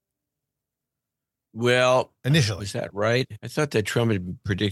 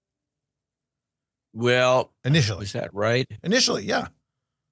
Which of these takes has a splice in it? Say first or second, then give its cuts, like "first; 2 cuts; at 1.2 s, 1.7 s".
first; 1 cut; at 3.4 s